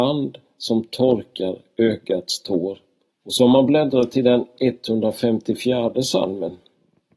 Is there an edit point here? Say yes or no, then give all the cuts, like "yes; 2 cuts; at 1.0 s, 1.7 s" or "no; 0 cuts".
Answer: yes; 1 cut; at 3.1 s